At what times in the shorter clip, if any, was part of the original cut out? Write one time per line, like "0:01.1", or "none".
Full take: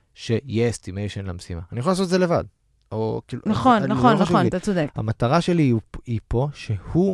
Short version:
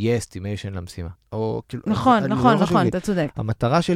0:01.2